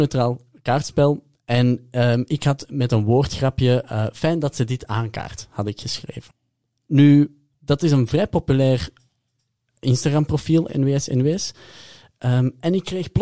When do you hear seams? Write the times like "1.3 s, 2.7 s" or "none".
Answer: 10.7 s